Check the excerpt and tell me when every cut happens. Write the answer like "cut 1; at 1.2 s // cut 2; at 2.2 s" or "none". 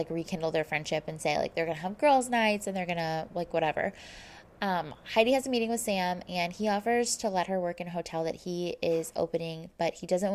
none